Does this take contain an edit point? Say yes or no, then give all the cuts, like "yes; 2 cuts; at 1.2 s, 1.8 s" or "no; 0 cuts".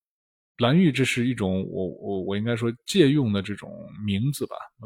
no; 0 cuts